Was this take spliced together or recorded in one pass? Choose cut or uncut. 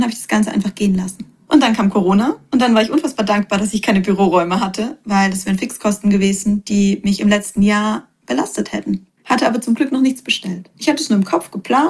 cut